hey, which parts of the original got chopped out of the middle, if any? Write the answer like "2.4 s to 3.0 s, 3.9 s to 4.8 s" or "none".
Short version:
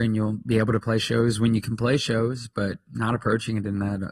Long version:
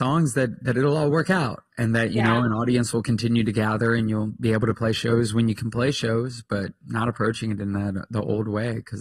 none